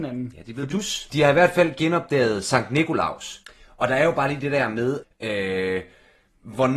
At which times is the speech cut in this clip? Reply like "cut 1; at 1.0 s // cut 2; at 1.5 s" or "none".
cut 1; at 1.1 s // cut 2; at 5.0 s